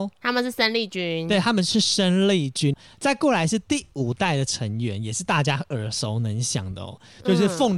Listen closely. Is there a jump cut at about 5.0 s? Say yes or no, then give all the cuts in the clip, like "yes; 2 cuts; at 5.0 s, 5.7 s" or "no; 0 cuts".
no; 1 cut; at 2.7 s